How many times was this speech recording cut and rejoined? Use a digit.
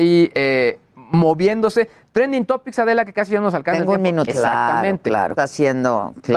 2